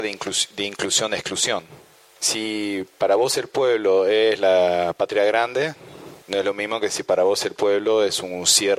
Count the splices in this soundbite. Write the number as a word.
two